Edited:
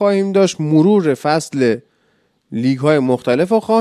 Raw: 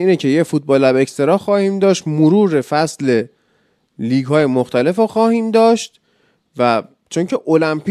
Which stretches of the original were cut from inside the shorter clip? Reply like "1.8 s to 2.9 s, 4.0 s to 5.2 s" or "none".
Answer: none